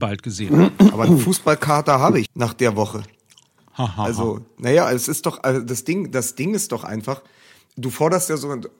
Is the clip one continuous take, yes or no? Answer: no